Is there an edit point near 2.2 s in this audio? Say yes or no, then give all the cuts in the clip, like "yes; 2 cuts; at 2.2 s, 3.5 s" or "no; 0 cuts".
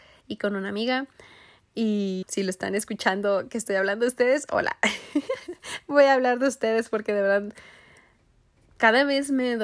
yes; 1 cut; at 2.2 s